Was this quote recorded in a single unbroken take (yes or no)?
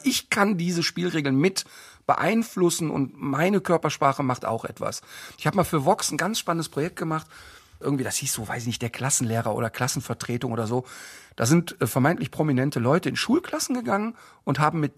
yes